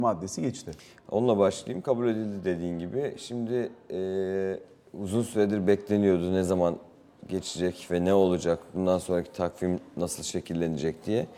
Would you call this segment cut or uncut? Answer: uncut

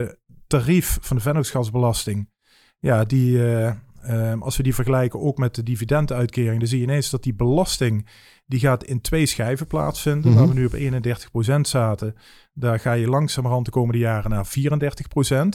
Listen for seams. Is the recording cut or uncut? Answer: uncut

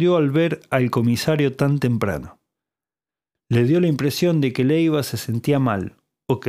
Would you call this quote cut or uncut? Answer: uncut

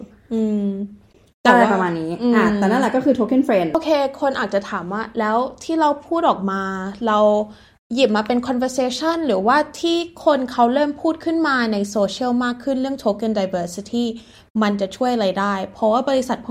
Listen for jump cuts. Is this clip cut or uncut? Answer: uncut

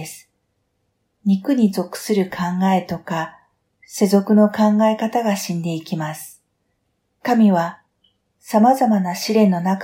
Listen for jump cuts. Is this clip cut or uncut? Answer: uncut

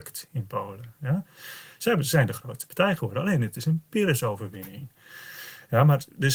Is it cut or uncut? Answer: uncut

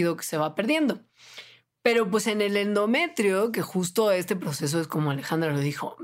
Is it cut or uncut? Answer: uncut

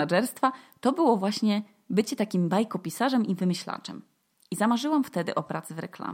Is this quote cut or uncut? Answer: uncut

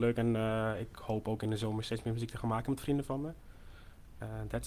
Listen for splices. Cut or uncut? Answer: uncut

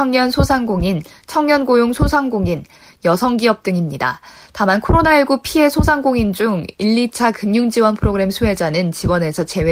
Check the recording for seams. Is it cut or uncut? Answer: uncut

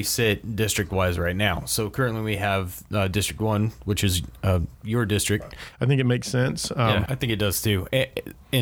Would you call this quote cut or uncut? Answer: cut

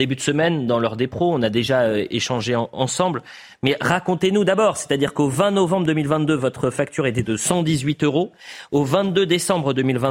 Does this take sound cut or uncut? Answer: uncut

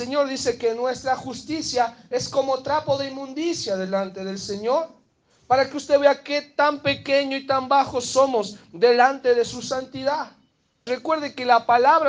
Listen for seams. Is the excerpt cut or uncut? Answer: cut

